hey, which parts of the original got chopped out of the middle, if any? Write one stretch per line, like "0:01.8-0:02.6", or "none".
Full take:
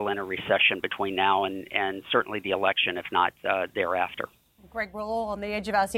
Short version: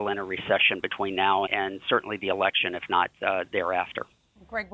0:01.5-0:01.7